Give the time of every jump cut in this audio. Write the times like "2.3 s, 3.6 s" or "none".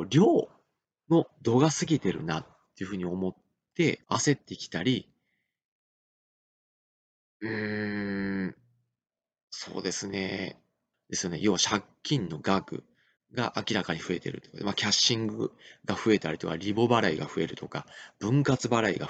4.0 s, 10.9 s